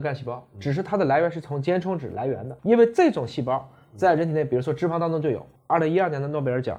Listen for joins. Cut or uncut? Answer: uncut